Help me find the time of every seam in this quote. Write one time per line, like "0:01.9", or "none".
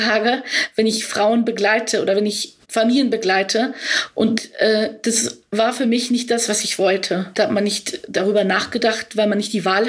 0:02.6
0:07.3